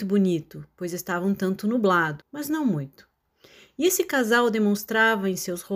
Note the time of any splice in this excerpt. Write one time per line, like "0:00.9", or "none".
0:02.2

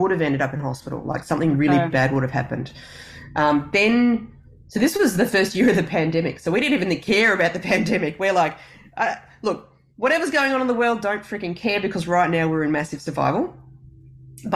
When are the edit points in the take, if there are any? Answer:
none

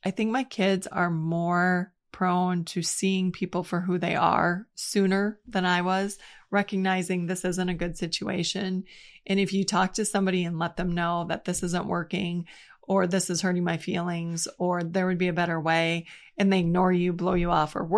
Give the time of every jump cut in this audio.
none

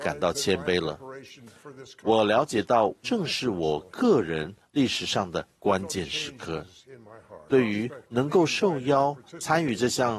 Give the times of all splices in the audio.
0:03.0
0:07.5

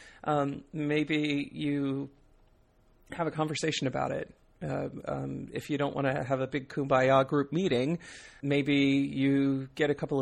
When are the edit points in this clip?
0:08.4

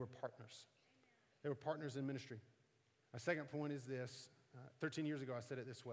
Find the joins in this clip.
0:03.0

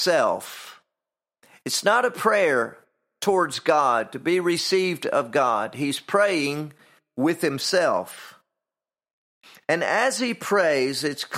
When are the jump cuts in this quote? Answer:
none

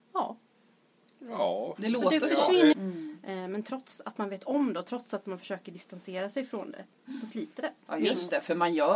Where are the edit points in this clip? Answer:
0:02.7
0:07.9

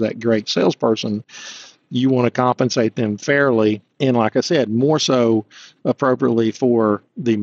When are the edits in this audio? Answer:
none

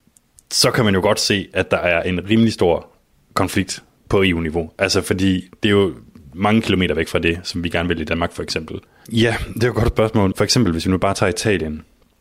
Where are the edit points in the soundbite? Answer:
0:09.0
0:10.3

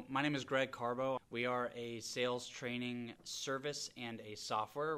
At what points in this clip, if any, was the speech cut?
0:01.2
0:03.2

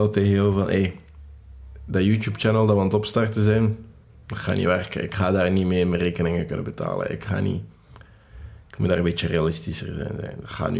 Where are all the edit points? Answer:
none

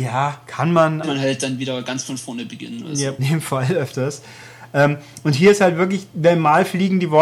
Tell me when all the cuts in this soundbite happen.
0:01.0
0:03.2

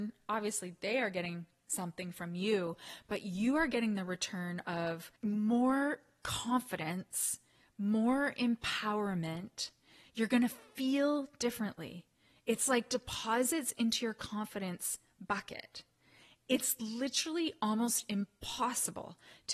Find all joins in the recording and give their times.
none

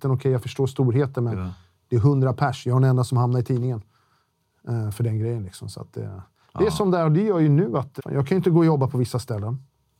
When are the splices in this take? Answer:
0:08.0

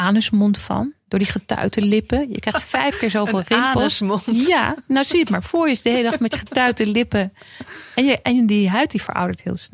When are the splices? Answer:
none

